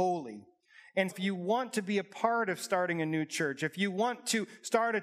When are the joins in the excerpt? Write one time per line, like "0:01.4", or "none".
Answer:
0:01.1